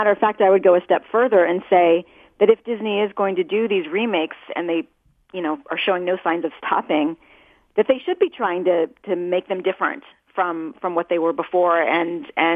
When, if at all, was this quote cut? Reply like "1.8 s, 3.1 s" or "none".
none